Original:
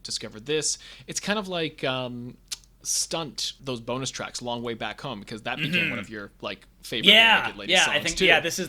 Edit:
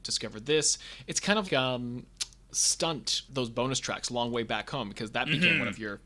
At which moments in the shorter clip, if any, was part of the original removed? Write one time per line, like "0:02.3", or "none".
0:01.4

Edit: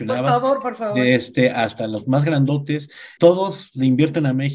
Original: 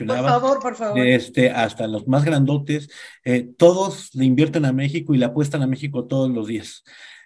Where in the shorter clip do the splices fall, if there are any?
0:03.2

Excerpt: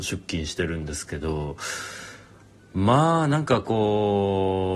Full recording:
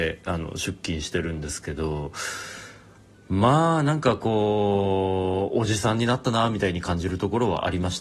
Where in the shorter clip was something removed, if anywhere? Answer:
none

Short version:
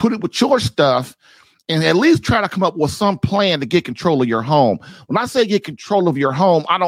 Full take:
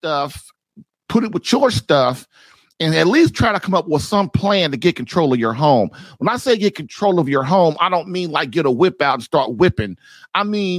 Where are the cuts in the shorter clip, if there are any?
none

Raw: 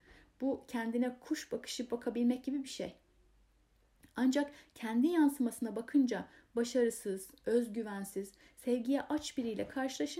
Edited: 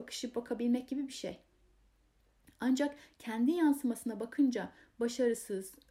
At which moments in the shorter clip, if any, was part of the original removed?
none

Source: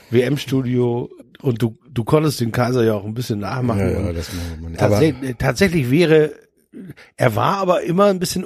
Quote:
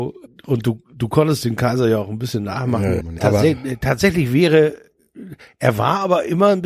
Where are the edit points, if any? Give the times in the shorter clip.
0:03.0

